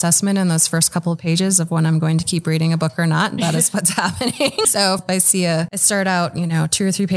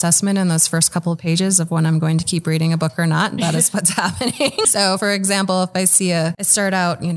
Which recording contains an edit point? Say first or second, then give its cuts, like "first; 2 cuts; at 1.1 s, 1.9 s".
first; 1 cut; at 5.0 s